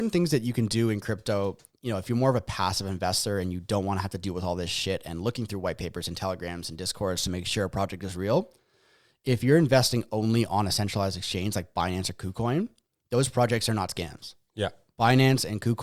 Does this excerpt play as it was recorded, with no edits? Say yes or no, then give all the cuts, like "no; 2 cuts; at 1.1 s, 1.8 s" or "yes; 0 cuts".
yes; 0 cuts